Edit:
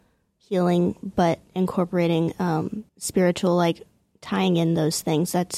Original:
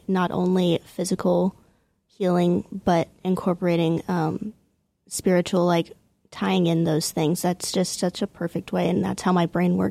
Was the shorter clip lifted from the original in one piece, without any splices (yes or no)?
no